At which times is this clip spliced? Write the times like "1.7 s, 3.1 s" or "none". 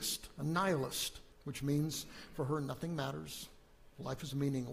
1.3 s